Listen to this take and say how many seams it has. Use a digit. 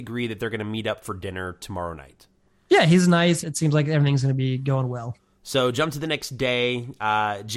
1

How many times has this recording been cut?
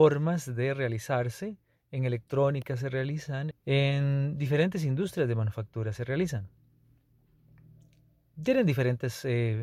1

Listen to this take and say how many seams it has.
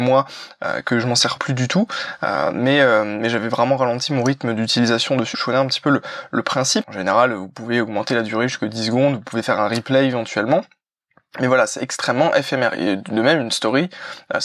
3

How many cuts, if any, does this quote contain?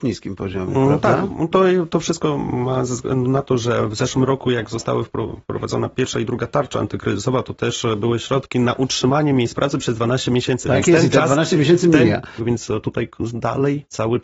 1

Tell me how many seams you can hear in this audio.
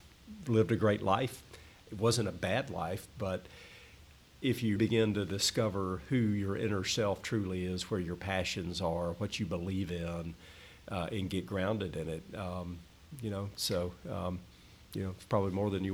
2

